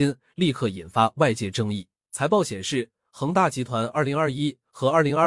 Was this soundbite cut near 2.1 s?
yes; 1 cut; at 2.1 s

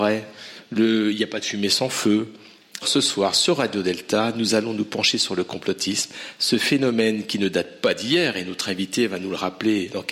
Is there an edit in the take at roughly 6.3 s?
no; 1 cut; at 2.8 s

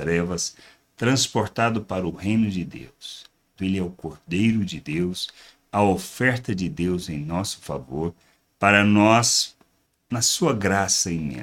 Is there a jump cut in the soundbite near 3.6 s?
yes; 1 cut; at 3.6 s

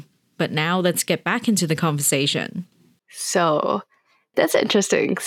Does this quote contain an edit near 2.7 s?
no; 1 cut; at 4.3 s

